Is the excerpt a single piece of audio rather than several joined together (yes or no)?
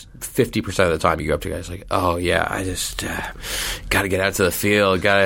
yes